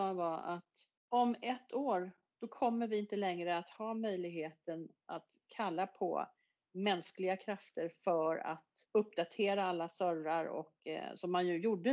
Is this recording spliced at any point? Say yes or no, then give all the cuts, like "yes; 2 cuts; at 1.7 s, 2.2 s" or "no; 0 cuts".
yes; 3 cuts; at 1.0 s, 2.3 s, 8.9 s